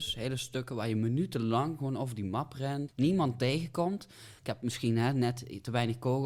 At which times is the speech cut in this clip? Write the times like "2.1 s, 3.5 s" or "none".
2.9 s, 4.4 s